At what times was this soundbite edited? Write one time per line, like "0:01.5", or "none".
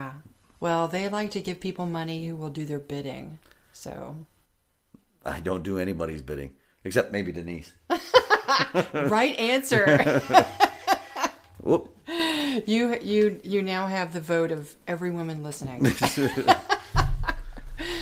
none